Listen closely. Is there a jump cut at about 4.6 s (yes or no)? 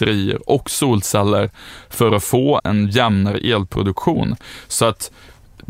no